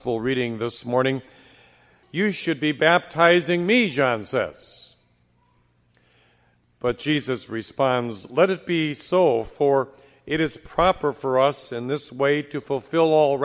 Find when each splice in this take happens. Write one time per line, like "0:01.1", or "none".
0:02.0

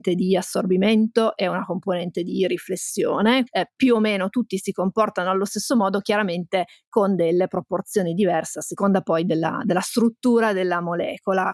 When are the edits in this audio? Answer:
0:03.5

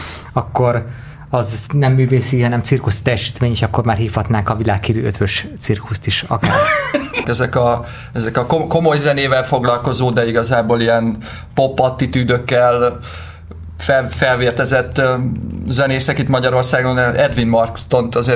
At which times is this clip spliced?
0:07.2

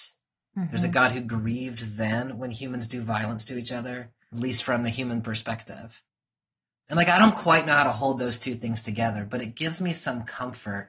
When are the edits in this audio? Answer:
0:04.3

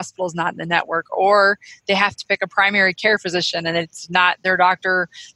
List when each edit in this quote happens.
none

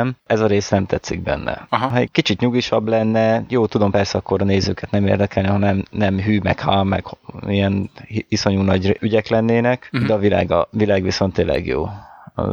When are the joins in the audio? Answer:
none

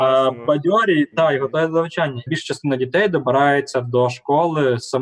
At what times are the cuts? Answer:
0:02.3

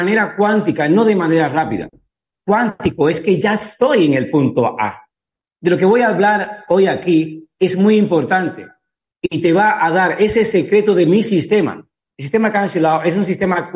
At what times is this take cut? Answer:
0:02.3
0:05.4
0:12.1

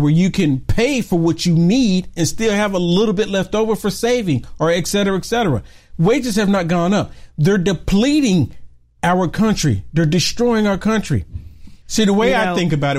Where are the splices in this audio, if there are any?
0:11.8

